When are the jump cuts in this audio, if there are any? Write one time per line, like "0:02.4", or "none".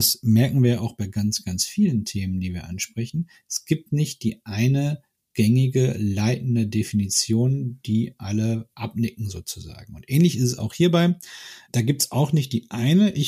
none